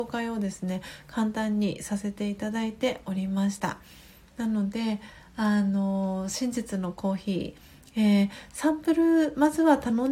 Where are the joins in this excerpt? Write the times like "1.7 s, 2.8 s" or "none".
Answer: none